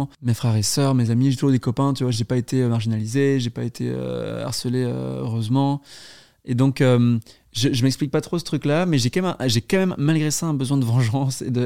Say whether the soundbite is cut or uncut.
uncut